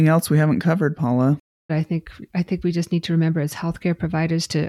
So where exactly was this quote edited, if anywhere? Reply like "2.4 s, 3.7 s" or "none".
1.7 s